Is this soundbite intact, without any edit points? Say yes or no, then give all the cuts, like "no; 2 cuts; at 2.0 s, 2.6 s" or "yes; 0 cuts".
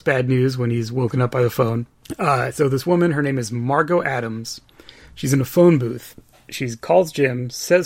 yes; 0 cuts